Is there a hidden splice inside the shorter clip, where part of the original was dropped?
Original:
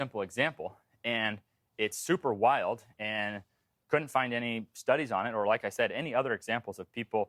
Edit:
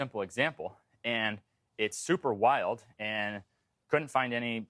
no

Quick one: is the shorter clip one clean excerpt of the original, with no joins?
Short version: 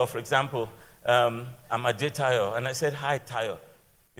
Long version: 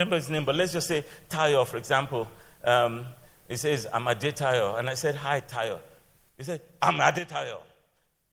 no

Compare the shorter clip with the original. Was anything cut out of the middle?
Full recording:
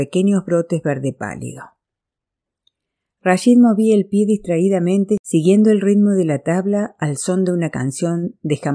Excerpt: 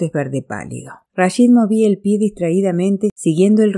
yes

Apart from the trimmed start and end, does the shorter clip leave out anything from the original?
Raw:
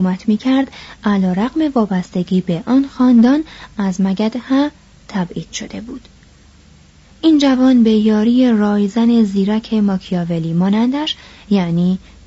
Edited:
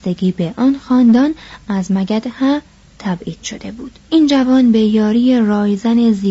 yes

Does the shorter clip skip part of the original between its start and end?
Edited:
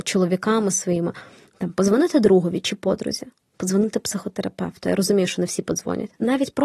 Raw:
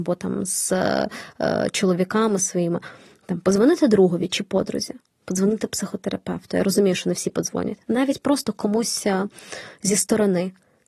no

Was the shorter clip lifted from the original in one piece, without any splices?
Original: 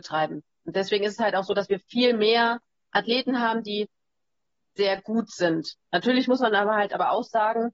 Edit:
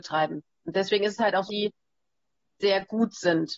no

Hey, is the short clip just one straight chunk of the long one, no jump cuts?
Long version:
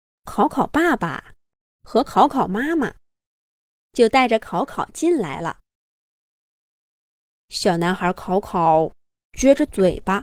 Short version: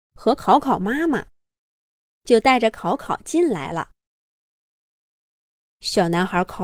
yes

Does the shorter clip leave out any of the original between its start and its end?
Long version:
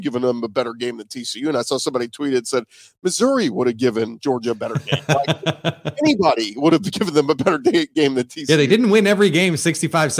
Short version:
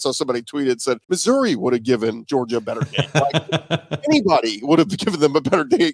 yes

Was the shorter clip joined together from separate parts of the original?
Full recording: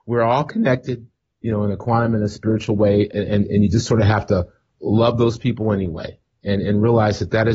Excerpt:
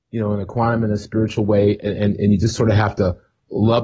no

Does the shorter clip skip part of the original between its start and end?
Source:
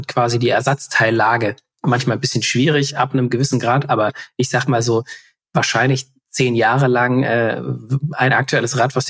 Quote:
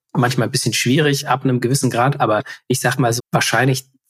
yes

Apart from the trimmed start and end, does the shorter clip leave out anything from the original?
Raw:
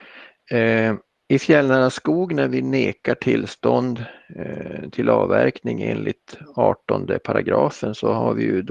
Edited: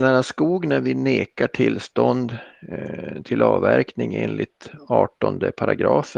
no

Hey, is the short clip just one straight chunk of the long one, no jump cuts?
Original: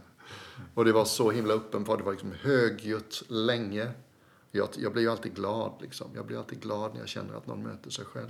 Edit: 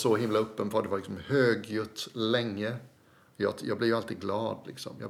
yes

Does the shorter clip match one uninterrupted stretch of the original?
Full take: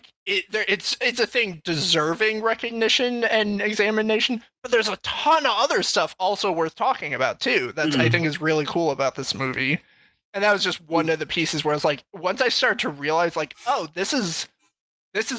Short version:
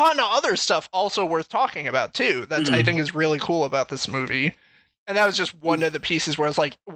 yes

